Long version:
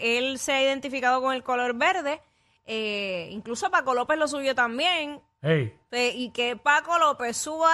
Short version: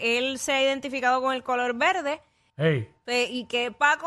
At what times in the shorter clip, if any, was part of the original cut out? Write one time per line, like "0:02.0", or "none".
0:02.5